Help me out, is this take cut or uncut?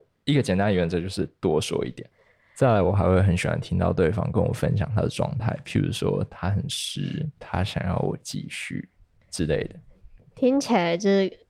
cut